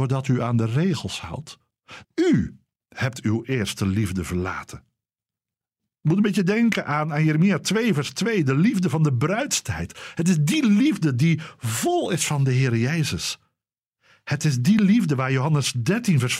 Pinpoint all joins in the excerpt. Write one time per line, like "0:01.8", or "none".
0:02.0

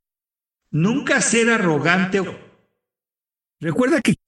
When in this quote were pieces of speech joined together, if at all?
0:02.2

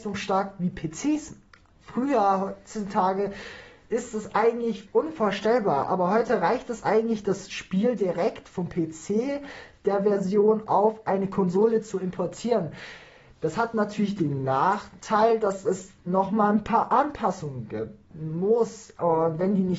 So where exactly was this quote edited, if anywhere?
0:04.9

